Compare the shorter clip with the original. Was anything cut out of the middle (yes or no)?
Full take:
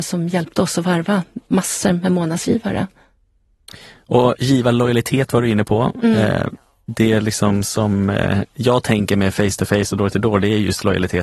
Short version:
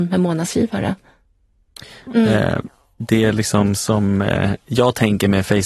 yes